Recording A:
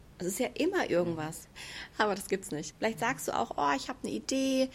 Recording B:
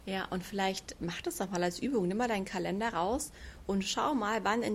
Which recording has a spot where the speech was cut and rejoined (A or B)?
A